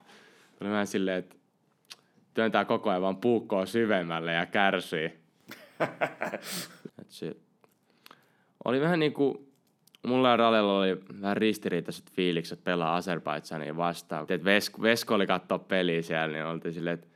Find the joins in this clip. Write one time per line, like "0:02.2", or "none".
0:06.9
0:14.3